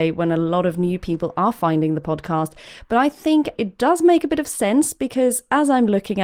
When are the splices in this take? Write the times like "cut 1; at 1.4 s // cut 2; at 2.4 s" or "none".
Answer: cut 1; at 3.6 s